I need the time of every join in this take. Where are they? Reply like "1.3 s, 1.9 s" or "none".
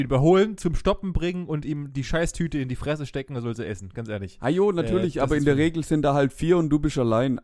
none